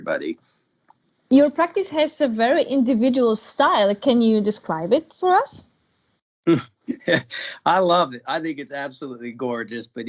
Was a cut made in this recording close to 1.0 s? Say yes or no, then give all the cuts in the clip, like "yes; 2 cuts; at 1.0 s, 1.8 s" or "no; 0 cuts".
no; 0 cuts